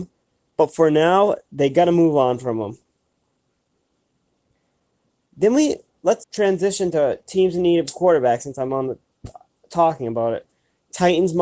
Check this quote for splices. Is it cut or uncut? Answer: cut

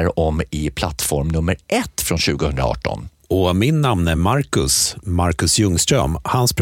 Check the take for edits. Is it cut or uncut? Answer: uncut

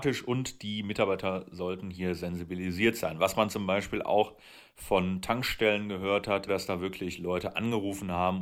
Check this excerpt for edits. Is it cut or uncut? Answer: cut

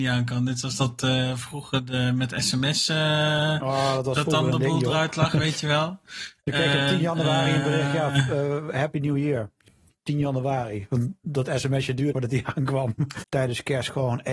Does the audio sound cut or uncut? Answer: cut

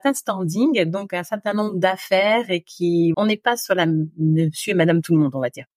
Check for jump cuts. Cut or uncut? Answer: cut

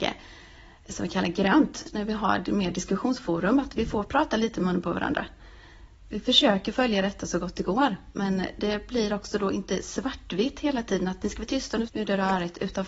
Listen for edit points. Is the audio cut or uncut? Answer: cut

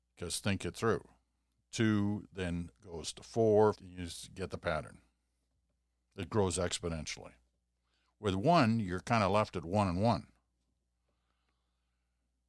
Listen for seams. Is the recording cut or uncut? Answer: cut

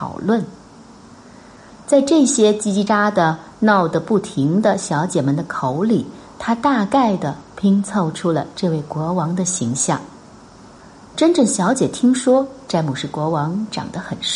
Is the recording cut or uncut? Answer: cut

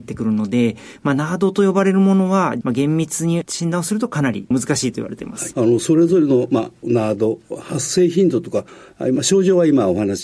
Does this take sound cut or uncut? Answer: cut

